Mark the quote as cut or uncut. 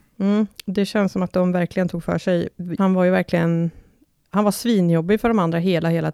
cut